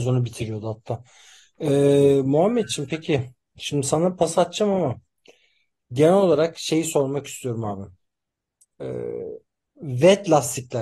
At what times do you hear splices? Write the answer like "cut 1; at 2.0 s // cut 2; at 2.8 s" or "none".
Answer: none

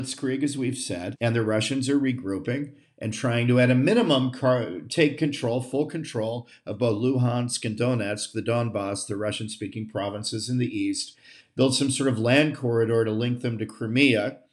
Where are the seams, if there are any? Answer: cut 1; at 1.1 s

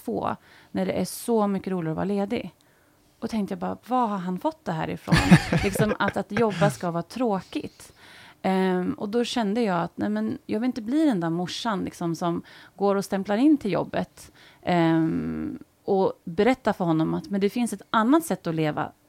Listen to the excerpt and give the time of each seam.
none

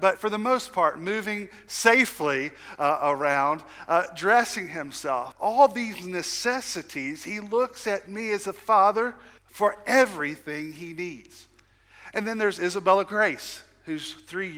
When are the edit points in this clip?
cut 1; at 5.3 s // cut 2; at 9.4 s

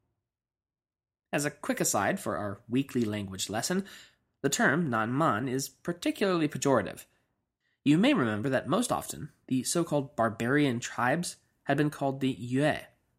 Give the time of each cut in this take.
none

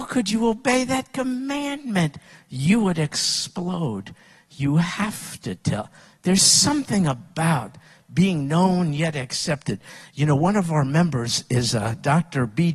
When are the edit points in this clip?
none

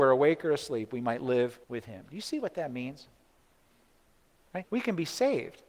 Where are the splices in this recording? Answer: cut 1; at 1.6 s // cut 2; at 4.6 s

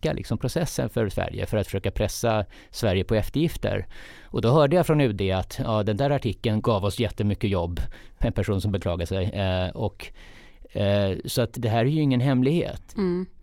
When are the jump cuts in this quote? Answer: cut 1; at 6.6 s // cut 2; at 8.2 s // cut 3; at 11.6 s

